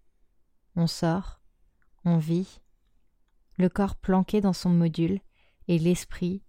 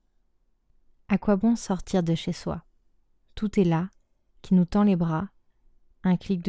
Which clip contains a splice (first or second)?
first